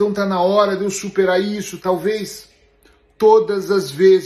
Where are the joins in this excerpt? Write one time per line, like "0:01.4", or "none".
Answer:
0:01.8